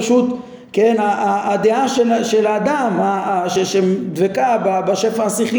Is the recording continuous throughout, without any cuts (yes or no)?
yes